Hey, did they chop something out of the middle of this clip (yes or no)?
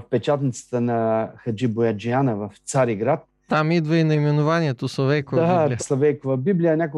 yes